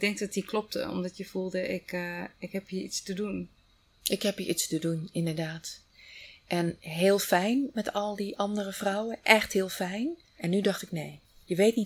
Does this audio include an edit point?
yes; 1 cut; at 10.4 s

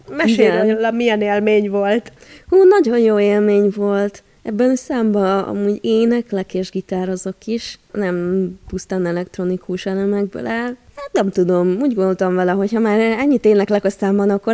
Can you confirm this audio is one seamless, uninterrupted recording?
yes; 0 cuts

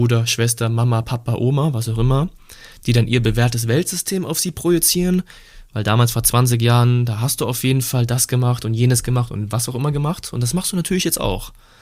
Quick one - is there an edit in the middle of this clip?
no; 0 cuts

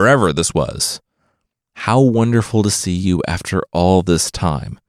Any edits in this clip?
no; 0 cuts

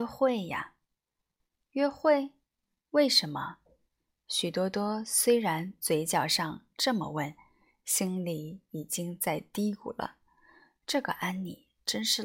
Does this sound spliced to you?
no; 0 cuts

